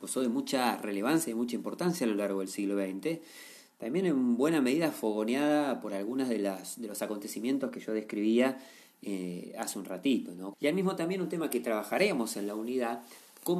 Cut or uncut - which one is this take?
cut